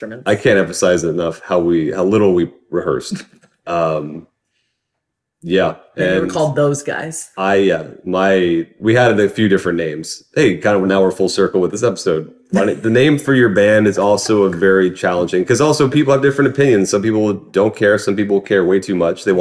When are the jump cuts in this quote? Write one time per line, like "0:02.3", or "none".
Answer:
none